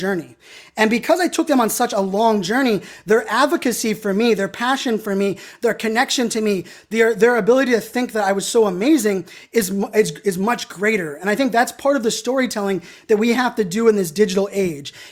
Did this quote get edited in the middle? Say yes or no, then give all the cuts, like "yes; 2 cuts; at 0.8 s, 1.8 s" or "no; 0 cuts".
no; 0 cuts